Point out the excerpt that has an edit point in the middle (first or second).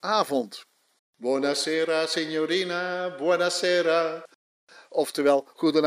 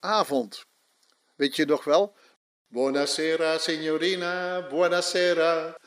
first